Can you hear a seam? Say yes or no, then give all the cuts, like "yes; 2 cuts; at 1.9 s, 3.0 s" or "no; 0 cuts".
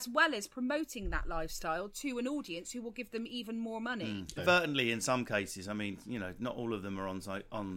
yes; 1 cut; at 4.4 s